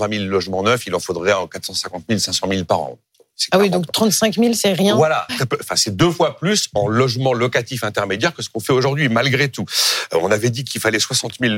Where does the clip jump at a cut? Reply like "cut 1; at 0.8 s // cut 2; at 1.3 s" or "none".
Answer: cut 1; at 5.3 s